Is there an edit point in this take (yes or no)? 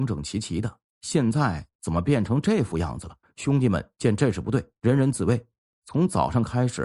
yes